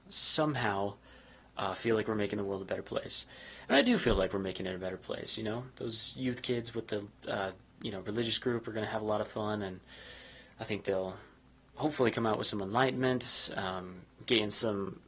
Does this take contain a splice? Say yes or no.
no